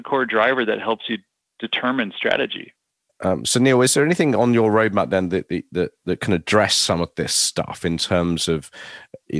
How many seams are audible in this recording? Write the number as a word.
one